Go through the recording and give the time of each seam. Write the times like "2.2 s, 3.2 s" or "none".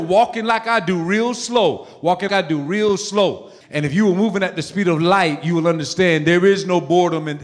2.3 s, 3.6 s